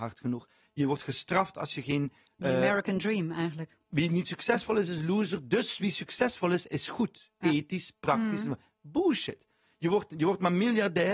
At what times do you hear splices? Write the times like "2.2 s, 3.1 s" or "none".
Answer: none

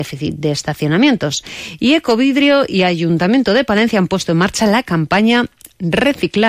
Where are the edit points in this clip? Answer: none

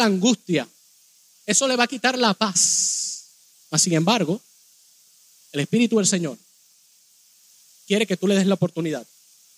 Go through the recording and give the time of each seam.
none

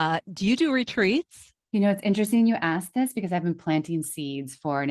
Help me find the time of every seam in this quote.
1.6 s

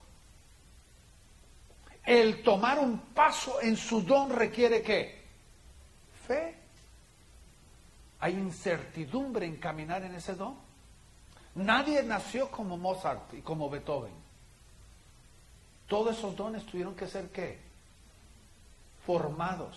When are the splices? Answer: 8.2 s

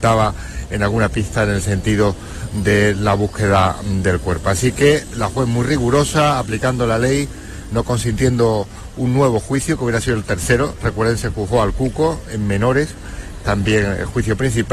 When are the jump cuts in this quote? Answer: none

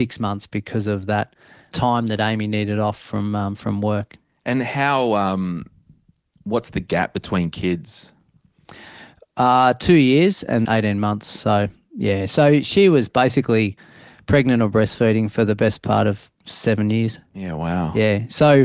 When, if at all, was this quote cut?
10.6 s

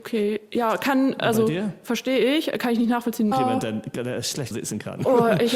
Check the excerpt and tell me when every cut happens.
3.3 s, 4.5 s

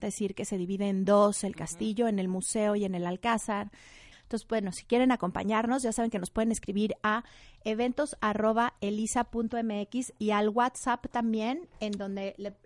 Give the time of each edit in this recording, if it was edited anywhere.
4.1 s

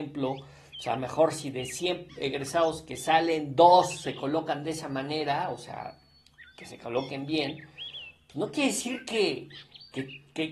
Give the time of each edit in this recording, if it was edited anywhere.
none

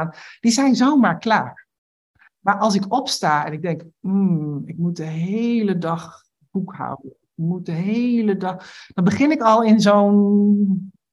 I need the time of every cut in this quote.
none

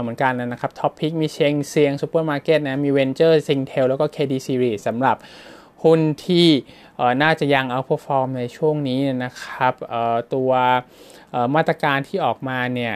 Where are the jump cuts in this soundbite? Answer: none

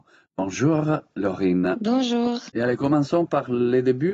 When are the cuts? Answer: 2.5 s

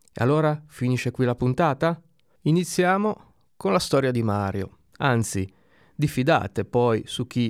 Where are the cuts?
2.4 s, 4.9 s

